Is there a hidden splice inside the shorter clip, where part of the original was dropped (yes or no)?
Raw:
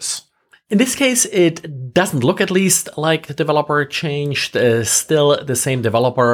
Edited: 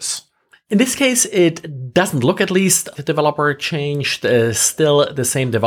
yes